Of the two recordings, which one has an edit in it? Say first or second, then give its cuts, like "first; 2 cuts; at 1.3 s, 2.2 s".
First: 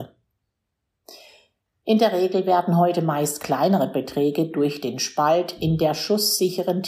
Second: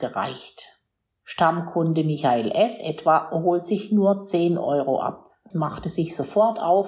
second; 1 cut; at 5.5 s